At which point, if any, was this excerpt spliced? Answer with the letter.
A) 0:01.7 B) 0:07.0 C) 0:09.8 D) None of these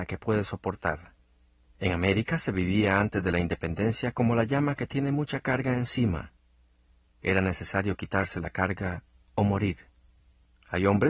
A